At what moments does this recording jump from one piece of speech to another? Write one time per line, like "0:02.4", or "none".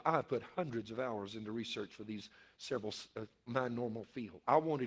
0:03.5